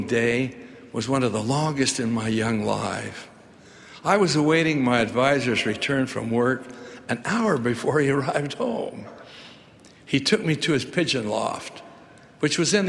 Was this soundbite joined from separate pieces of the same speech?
no; 0 cuts

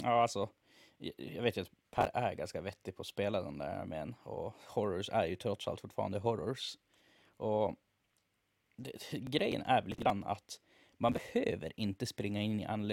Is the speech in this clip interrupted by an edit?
no; 0 cuts

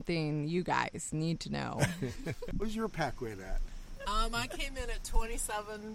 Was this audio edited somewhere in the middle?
no; 0 cuts

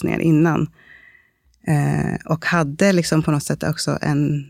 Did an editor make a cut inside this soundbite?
no; 0 cuts

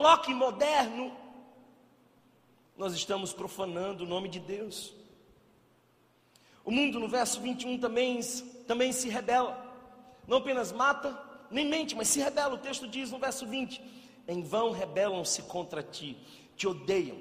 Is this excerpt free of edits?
yes; 0 cuts

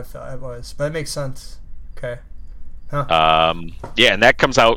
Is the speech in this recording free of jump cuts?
yes; 0 cuts

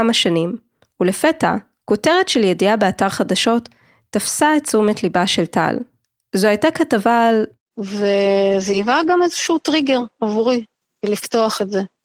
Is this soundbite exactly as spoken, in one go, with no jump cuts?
no; 1 cut; at 7.7 s

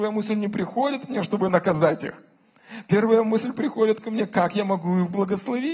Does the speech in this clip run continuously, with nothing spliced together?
yes; 0 cuts

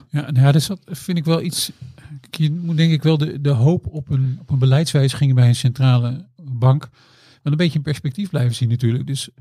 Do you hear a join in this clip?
no; 0 cuts

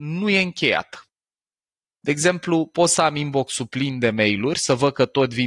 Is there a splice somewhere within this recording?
no; 0 cuts

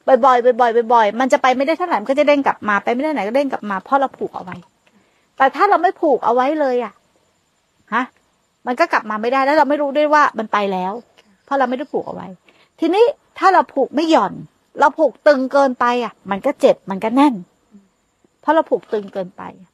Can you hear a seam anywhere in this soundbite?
no; 0 cuts

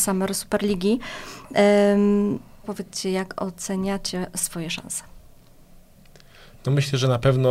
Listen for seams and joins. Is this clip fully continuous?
no; 1 cut; at 2.6 s

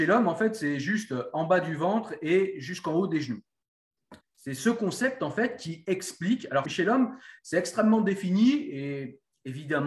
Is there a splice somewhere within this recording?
yes; 2 cuts; at 4.2 s, 6.6 s

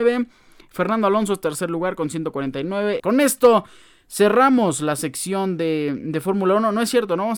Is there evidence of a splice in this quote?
yes; 1 cut; at 3.0 s

